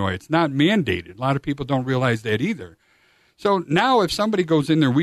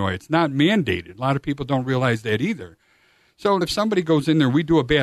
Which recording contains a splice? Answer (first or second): second